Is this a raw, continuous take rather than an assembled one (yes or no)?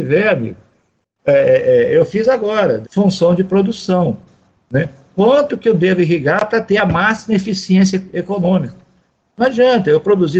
no